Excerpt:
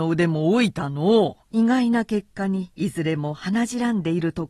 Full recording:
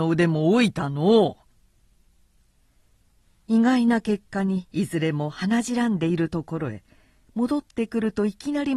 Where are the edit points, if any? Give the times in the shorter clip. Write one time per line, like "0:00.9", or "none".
0:01.4

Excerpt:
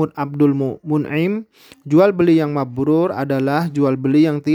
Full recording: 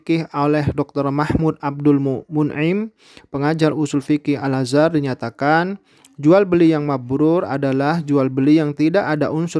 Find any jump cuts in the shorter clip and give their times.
0:01.7

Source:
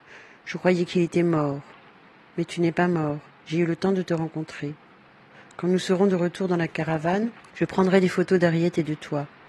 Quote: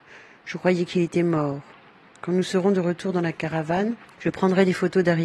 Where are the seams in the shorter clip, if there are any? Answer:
0:02.1

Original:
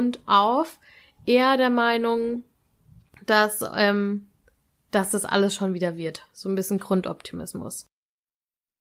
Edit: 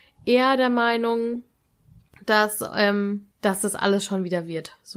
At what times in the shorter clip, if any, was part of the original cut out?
0:03.3

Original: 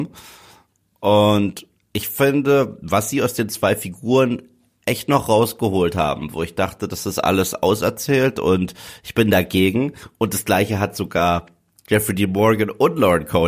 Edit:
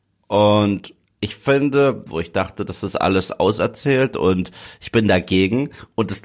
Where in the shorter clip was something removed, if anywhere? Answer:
0:02.1

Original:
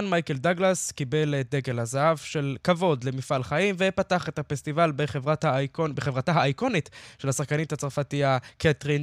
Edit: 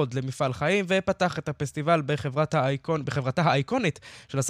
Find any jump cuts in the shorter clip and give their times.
none

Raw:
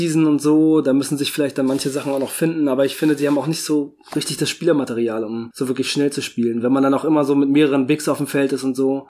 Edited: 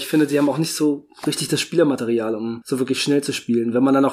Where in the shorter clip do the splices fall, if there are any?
none

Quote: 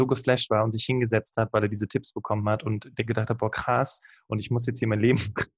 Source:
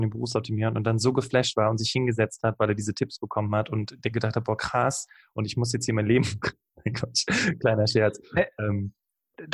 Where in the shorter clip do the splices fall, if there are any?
none

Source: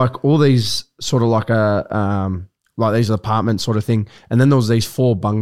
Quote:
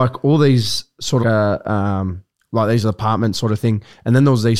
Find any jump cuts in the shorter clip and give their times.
0:01.2

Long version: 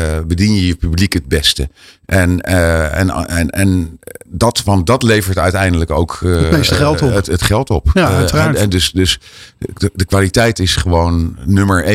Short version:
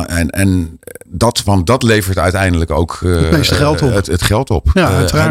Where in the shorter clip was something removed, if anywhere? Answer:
none

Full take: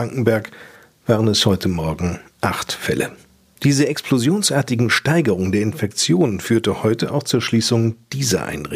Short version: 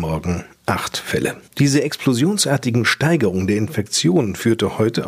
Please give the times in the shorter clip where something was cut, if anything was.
0:01.5

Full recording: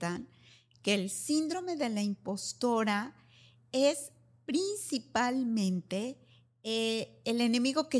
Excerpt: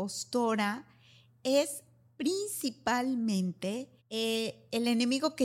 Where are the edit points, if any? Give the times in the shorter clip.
0:04.0

